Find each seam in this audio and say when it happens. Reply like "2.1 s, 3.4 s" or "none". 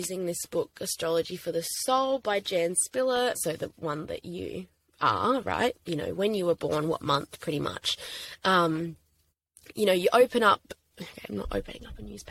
3.3 s, 5.7 s